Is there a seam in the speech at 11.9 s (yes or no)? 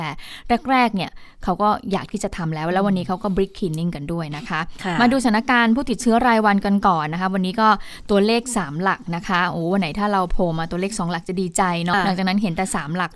yes